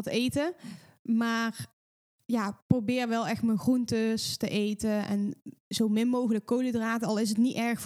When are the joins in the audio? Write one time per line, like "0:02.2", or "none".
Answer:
none